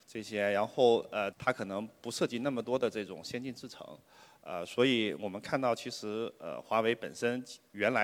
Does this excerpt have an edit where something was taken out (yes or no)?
yes